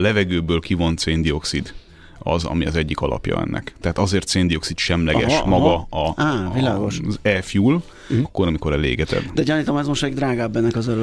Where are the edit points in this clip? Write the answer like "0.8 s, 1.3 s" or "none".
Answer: 8.2 s